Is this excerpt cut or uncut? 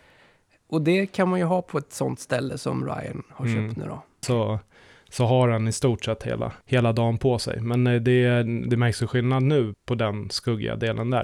cut